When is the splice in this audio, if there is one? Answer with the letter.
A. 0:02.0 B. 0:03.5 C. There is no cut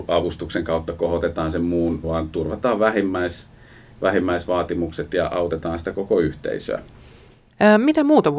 A